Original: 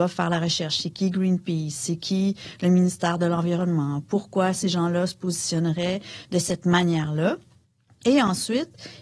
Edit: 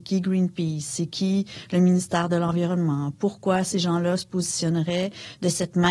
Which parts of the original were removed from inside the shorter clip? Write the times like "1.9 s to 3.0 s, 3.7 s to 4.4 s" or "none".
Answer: none